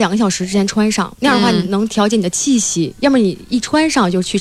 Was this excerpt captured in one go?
yes; 0 cuts

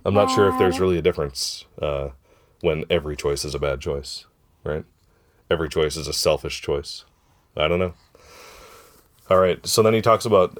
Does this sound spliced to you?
no; 0 cuts

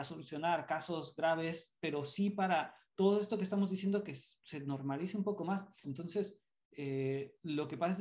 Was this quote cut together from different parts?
yes; 1 cut; at 5.8 s

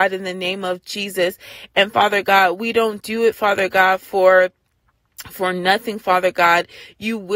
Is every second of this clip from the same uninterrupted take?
yes; 0 cuts

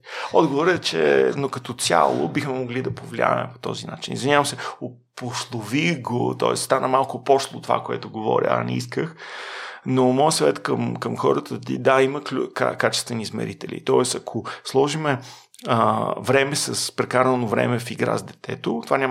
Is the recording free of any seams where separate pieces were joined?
yes; 0 cuts

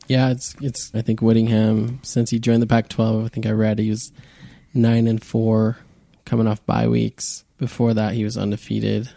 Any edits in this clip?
yes; 2 cuts; at 0.9 s, 7.5 s

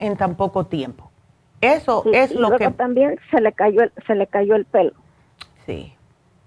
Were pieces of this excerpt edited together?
no; 0 cuts

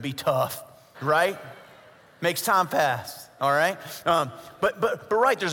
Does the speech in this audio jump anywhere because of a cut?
yes; 2 cuts; at 0.9 s, 3.4 s

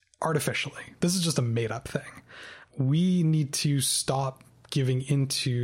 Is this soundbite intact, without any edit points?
yes; 0 cuts

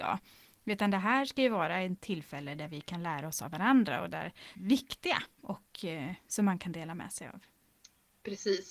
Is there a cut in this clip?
yes; 1 cut; at 4.5 s

